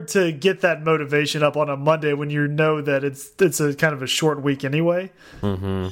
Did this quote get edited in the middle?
no; 0 cuts

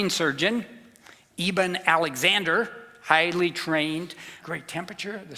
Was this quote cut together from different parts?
yes; 1 cut; at 4.4 s

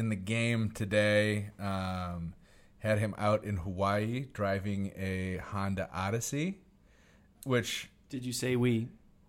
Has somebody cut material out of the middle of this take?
yes; 1 cut; at 7.4 s

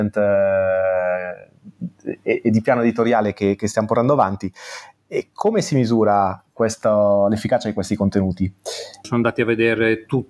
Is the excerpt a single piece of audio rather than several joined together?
no; 1 cut; at 9.0 s

